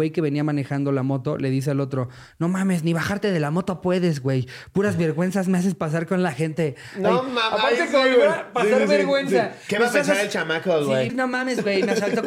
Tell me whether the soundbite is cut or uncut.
cut